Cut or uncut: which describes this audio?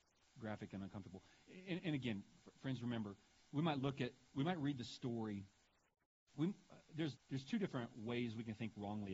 cut